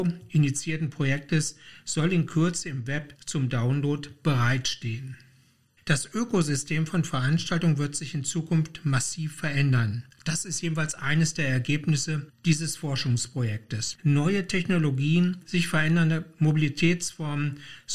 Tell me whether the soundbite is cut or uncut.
cut